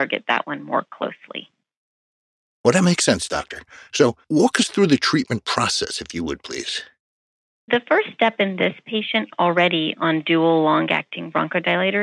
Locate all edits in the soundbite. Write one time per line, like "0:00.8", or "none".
none